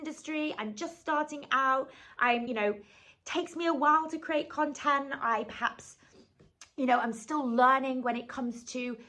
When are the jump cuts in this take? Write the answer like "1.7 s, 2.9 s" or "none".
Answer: none